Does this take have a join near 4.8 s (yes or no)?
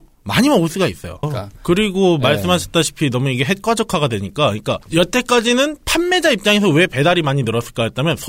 yes